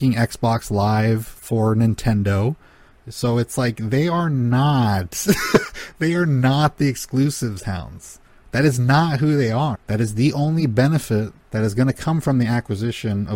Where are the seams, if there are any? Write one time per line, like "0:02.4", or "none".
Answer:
0:09.8
0:11.4